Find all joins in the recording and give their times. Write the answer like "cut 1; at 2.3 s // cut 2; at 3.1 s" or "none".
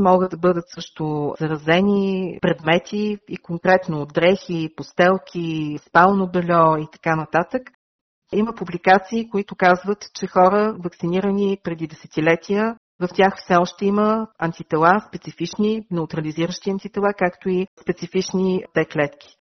none